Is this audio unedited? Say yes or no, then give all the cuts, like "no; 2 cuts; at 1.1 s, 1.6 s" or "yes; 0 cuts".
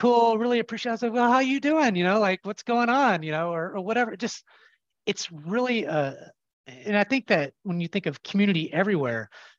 yes; 0 cuts